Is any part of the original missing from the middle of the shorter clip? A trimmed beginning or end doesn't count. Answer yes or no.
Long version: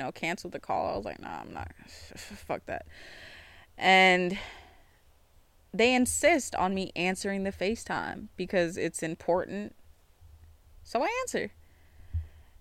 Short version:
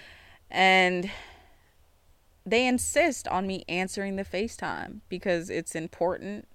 no